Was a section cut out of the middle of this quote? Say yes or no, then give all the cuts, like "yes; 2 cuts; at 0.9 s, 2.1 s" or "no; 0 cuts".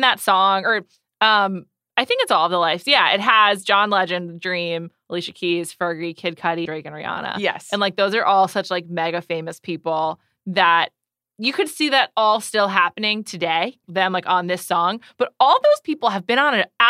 yes; 2 cuts; at 6.7 s, 13.8 s